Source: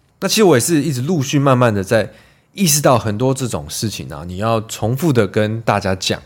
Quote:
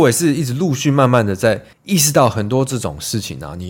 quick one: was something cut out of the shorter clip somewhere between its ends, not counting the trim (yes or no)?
yes